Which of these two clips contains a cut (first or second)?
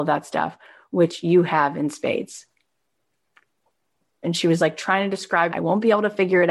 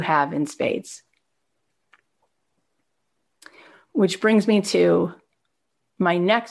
first